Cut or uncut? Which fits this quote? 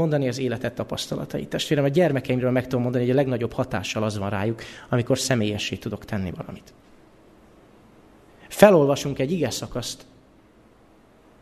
uncut